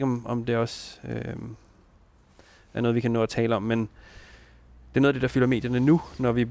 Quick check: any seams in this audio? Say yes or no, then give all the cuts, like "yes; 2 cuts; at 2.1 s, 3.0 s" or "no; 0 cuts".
no; 0 cuts